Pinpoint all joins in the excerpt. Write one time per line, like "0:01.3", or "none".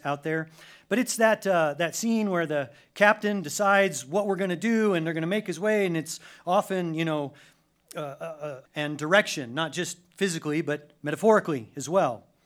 0:08.6